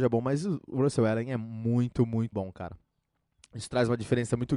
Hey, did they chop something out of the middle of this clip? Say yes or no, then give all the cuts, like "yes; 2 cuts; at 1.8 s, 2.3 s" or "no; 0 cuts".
yes; 1 cut; at 2.3 s